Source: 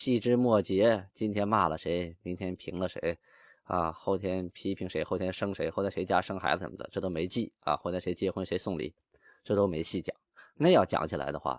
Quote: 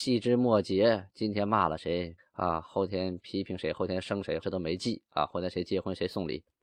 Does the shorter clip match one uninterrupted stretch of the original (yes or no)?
no